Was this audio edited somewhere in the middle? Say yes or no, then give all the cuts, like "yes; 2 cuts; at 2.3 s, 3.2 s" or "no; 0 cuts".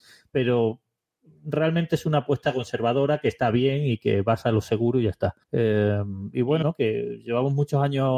yes; 2 cuts; at 5.4 s, 6.6 s